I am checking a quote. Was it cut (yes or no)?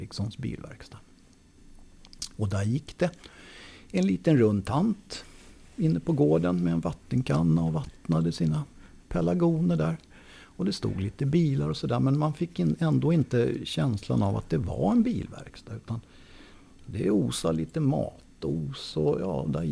no